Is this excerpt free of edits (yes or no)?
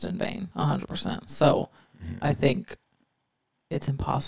yes